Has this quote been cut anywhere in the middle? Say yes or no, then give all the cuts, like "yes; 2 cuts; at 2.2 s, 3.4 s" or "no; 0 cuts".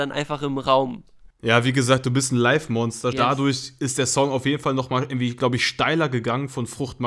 yes; 1 cut; at 3.1 s